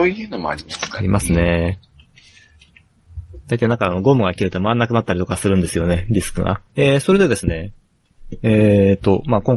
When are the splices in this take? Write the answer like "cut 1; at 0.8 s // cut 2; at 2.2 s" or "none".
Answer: cut 1; at 6.7 s